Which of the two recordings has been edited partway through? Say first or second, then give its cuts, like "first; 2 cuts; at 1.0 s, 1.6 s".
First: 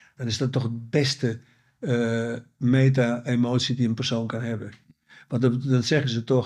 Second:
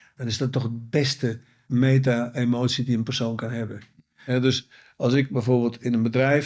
second; 2 cuts; at 1.6 s, 4.3 s